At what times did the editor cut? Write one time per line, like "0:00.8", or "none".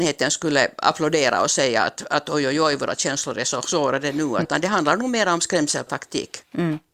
0:04.4